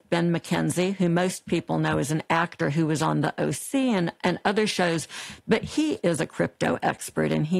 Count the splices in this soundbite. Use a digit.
1